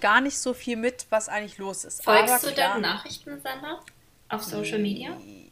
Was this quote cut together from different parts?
no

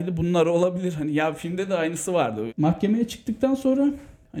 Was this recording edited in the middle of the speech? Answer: yes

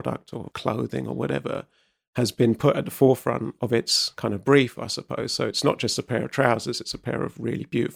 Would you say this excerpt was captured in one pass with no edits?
yes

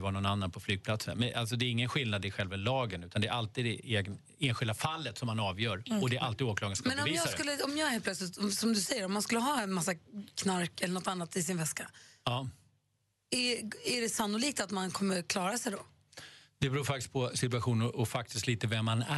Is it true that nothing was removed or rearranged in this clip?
yes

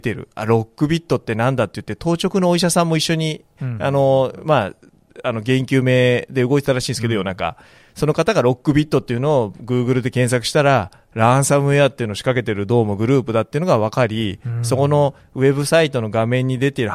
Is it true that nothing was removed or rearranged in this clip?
yes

